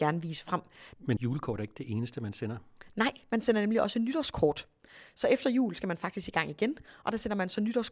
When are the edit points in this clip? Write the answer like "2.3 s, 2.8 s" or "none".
0.9 s